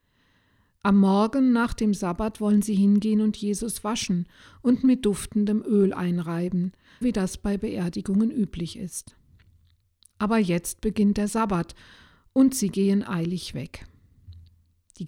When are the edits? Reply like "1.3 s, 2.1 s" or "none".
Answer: 7.0 s